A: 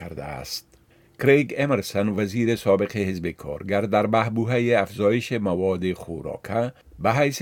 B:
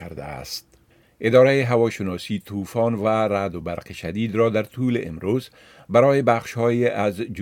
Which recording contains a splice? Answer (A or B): B